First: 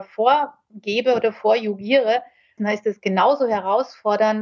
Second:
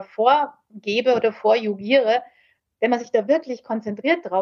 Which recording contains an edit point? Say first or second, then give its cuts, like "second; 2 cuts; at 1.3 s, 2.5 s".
first; 1 cut; at 2.6 s